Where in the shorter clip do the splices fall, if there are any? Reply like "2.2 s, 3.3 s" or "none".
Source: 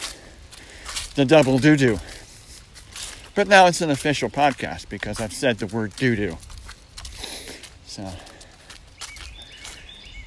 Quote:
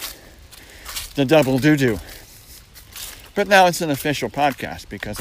none